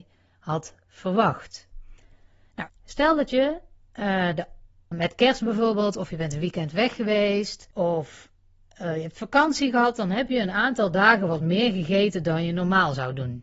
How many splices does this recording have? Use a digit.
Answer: 3